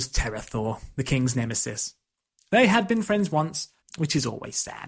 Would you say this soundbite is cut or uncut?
cut